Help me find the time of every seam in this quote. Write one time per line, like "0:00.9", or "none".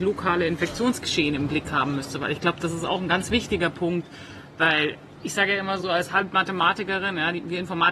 0:05.8